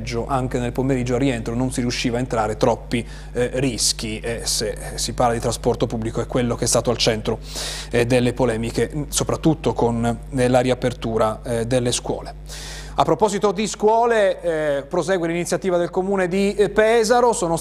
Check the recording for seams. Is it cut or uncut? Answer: uncut